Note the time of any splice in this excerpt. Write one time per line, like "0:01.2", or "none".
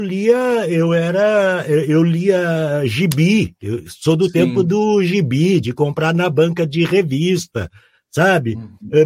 none